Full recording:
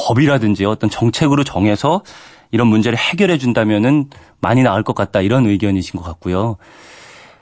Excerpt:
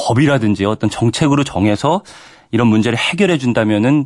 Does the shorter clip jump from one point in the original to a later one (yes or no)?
no